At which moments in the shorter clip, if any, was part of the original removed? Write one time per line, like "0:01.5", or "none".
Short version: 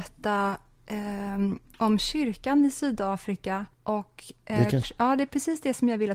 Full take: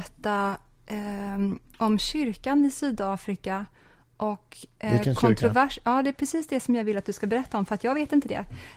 0:03.7
0:04.8